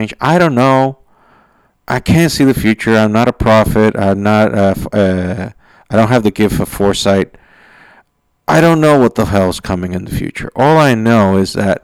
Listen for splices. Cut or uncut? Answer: uncut